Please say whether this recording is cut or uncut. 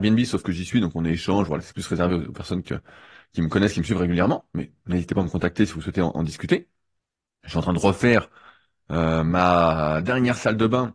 uncut